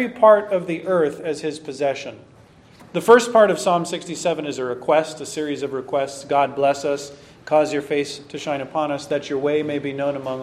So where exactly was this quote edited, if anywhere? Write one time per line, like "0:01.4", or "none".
0:02.8